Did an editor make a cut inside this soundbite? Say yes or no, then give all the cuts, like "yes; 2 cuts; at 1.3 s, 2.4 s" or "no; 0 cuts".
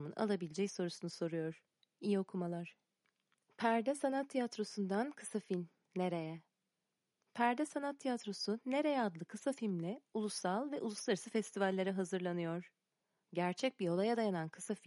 no; 0 cuts